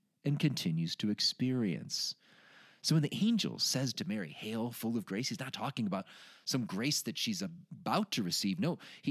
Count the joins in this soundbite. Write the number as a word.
zero